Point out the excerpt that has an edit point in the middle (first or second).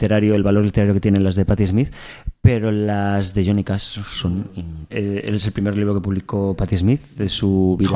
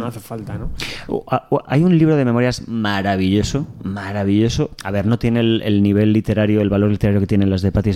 first